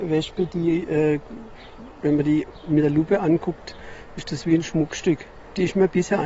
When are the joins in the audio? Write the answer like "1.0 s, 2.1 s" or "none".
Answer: none